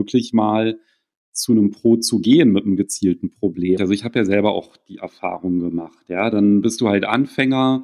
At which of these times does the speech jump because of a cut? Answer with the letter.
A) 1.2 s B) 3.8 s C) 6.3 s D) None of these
B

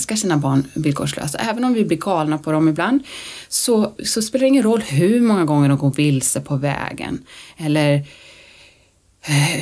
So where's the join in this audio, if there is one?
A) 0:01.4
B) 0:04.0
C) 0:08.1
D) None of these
B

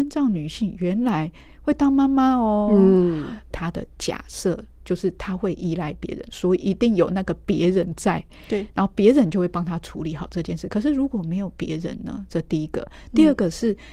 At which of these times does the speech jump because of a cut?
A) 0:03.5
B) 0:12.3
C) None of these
A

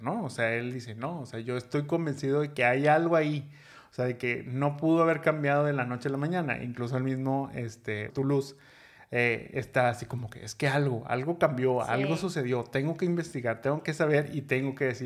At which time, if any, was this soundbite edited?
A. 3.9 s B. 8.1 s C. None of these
B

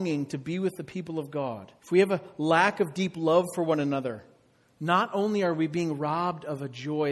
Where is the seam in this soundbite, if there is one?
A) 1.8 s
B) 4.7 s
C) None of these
A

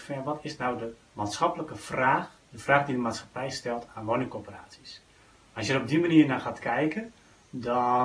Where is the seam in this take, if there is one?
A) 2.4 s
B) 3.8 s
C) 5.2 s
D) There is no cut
A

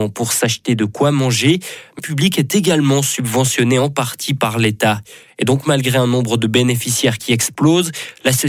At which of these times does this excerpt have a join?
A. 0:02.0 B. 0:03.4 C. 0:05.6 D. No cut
A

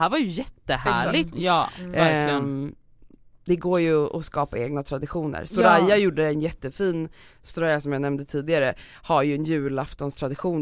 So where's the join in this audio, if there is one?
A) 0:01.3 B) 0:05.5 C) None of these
A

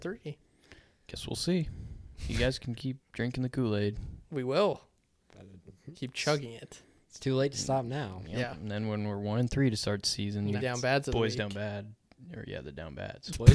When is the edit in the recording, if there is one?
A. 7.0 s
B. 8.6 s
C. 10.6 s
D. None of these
C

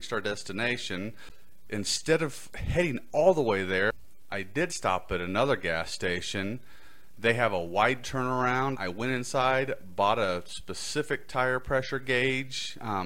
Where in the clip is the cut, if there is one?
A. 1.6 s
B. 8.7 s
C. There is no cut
B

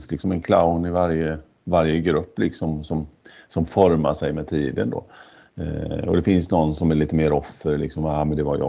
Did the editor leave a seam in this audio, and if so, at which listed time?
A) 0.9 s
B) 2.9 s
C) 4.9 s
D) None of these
D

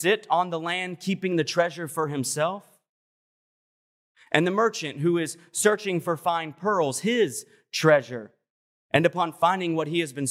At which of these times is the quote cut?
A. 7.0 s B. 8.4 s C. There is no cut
C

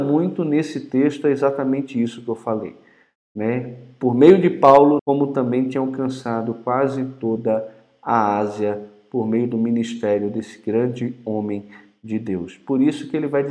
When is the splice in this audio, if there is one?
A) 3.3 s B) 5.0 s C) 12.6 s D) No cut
B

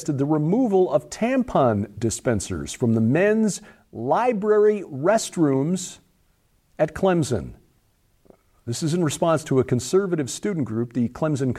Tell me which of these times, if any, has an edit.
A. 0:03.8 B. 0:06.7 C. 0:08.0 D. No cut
D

